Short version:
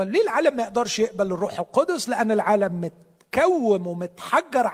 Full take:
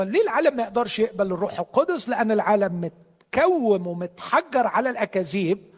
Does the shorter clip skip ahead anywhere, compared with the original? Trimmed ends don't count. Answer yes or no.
no